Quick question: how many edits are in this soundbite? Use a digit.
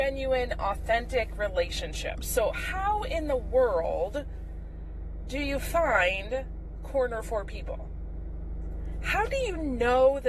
0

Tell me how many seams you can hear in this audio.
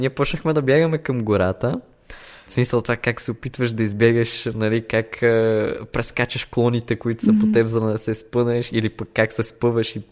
1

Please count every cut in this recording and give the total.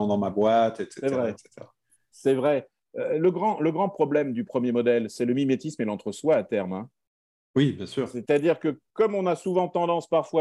0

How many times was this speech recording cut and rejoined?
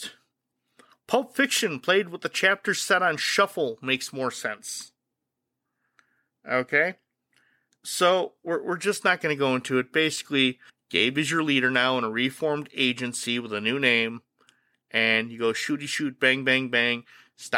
1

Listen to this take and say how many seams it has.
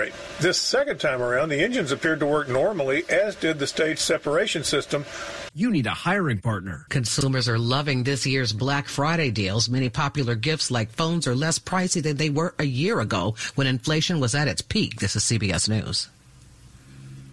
2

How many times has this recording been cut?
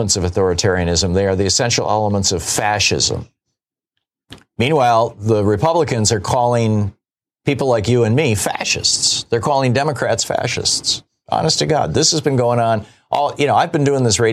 0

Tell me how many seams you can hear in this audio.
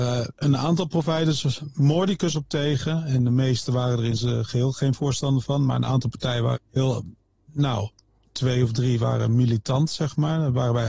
1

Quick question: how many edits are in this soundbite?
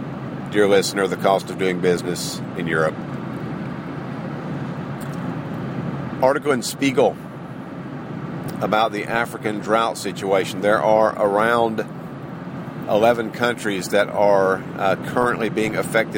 0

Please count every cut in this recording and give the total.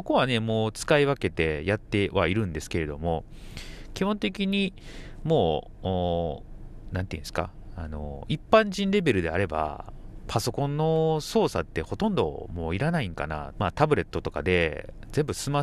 1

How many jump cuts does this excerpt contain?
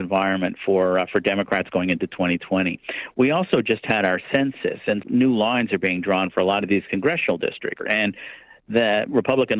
2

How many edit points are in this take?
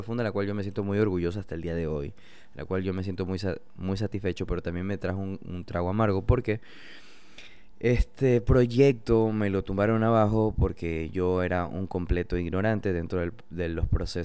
0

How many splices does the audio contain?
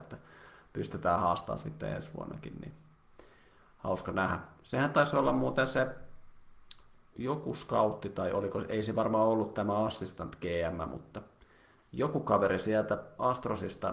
1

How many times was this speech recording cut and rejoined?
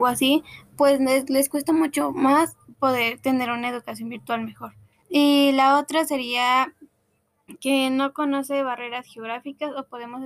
1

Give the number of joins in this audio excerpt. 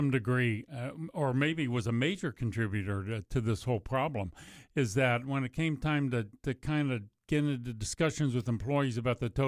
0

